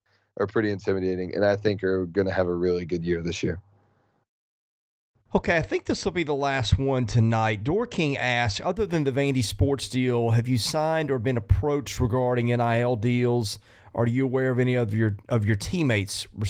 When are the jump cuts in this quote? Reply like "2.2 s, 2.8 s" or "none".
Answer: none